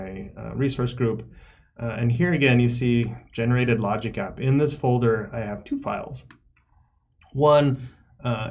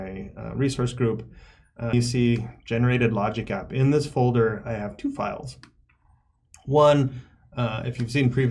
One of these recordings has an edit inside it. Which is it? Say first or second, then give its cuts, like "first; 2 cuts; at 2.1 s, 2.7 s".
second; 1 cut; at 1.9 s